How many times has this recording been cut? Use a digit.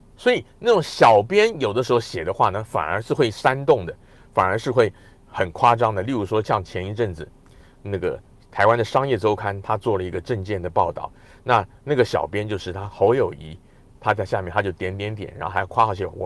0